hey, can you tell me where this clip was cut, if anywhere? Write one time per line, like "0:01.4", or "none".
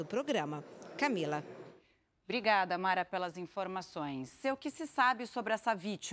0:04.4